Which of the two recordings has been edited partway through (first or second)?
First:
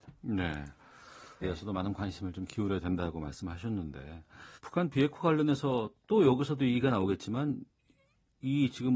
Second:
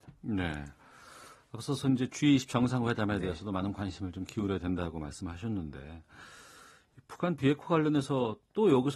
first